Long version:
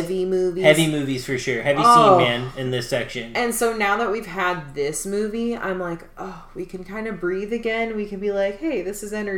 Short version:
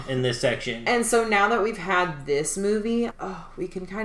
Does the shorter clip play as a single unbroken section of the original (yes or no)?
no